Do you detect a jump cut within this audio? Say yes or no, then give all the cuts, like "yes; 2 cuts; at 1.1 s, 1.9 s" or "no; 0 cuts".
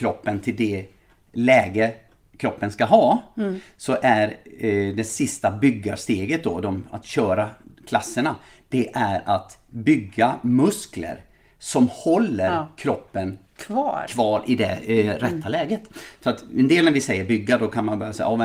no; 0 cuts